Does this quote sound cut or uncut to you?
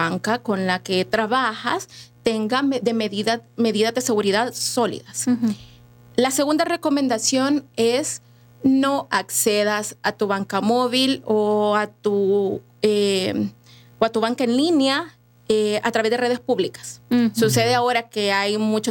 uncut